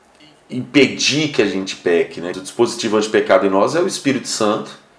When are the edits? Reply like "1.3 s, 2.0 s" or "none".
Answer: 2.3 s